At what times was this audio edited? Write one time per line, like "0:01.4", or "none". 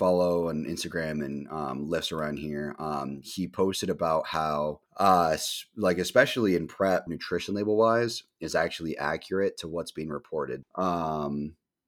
0:04.9
0:07.1
0:10.6